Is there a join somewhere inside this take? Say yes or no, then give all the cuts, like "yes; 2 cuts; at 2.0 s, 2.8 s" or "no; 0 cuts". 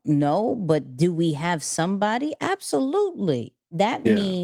no; 0 cuts